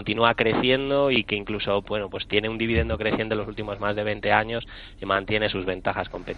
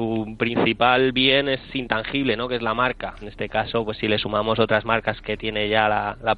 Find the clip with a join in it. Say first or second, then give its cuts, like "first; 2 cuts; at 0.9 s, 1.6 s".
second; 1 cut; at 3.2 s